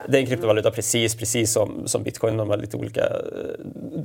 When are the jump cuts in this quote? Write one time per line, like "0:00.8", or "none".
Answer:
none

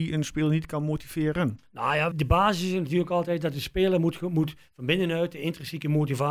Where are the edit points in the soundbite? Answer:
0:02.1

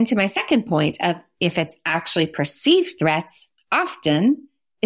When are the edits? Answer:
none

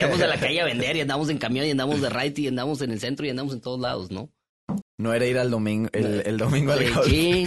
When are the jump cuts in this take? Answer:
0:04.8

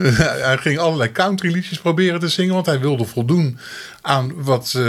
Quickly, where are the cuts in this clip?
none

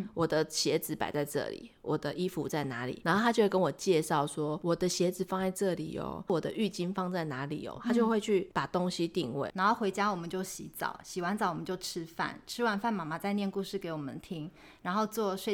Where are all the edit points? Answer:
0:09.5

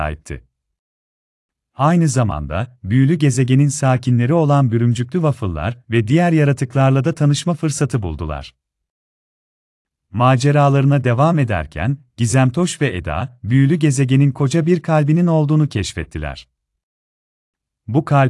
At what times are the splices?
0:01.7

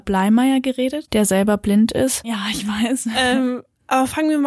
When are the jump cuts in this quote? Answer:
0:02.2

